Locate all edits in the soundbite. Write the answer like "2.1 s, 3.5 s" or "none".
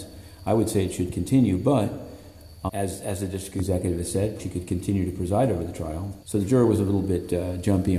2.7 s, 4.4 s, 6.2 s